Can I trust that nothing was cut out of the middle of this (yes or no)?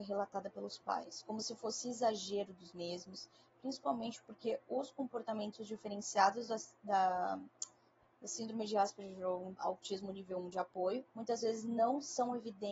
no